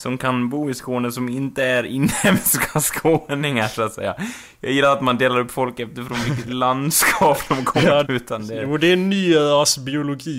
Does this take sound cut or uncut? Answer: cut